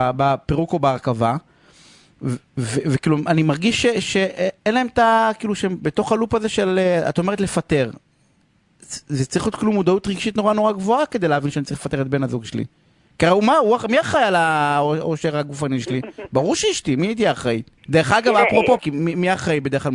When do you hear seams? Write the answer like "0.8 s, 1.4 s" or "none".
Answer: 17.8 s, 18.8 s